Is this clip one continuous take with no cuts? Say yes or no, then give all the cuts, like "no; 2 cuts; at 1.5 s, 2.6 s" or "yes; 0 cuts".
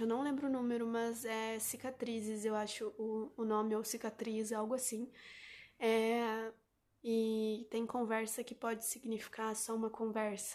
no; 1 cut; at 7.0 s